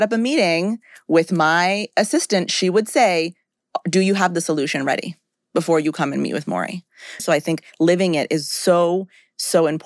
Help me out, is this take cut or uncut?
cut